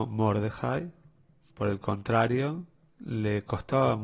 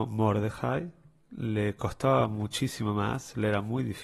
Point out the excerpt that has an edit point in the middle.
second; 1 cut; at 1.2 s

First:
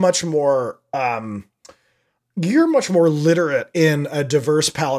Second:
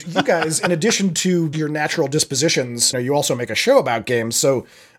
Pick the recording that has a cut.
second; 2 cuts; at 1.5 s, 2.9 s

